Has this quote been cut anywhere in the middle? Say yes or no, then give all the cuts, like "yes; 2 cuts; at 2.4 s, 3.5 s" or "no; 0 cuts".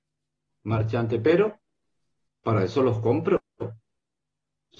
yes; 1 cut; at 2.3 s